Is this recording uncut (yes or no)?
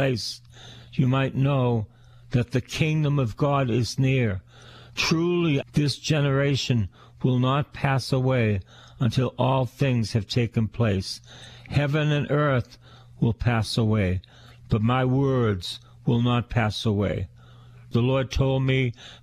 no